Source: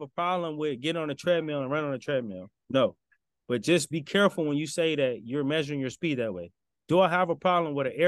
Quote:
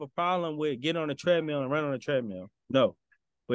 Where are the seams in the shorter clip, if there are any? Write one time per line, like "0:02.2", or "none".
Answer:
none